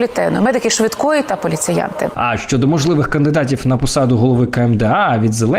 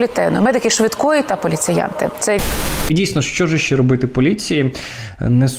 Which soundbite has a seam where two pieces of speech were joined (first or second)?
first